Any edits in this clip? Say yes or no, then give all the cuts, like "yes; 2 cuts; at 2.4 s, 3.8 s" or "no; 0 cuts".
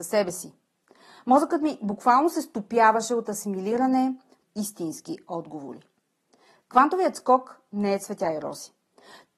yes; 1 cut; at 4.4 s